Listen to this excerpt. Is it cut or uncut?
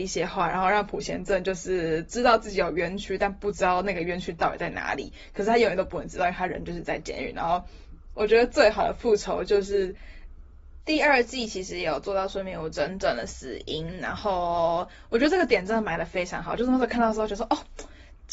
cut